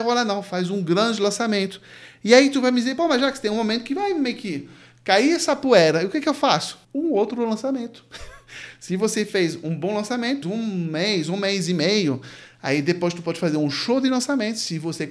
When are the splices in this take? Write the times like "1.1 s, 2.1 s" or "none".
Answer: 6.8 s, 10.4 s